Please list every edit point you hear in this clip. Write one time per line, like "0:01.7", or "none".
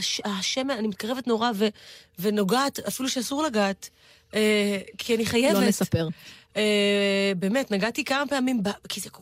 none